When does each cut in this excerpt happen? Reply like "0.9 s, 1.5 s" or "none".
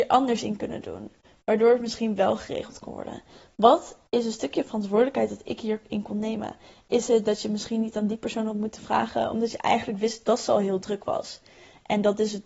none

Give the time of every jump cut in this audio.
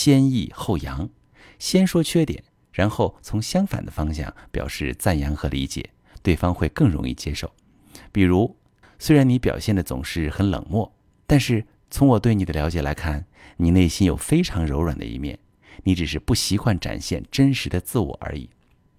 8.8 s

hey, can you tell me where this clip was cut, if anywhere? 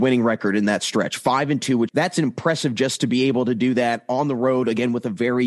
1.9 s

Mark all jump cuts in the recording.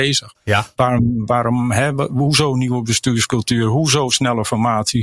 none

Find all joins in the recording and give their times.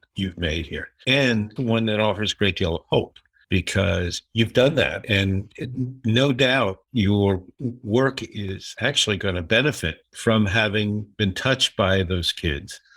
1.6 s

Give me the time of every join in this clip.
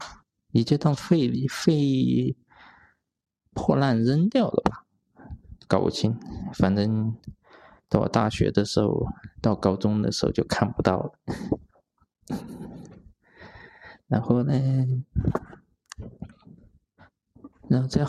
none

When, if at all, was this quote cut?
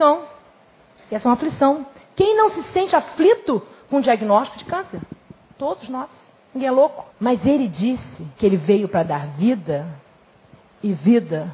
7.1 s, 8.4 s

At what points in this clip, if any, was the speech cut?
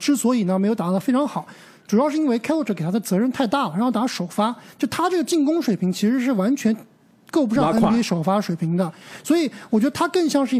none

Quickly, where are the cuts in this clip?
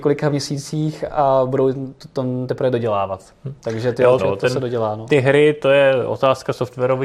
4.2 s

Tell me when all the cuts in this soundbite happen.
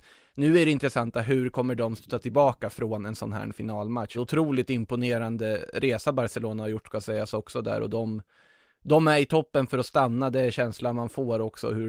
4.1 s

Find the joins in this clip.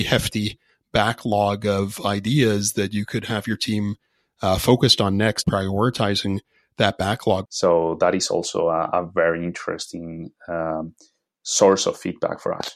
5.4 s, 7.5 s

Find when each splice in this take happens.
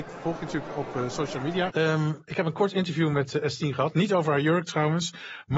1.7 s

